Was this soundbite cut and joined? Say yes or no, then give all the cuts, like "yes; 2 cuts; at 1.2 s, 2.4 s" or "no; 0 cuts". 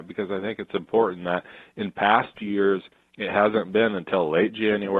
no; 0 cuts